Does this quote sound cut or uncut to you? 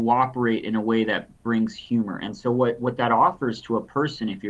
uncut